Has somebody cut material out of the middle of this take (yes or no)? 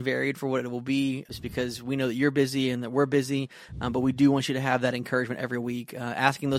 yes